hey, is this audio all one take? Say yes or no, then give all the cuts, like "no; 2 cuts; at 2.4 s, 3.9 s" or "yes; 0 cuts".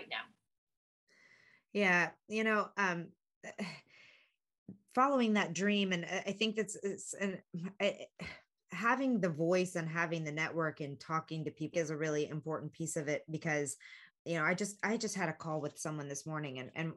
no; 2 cuts; at 11.7 s, 14.1 s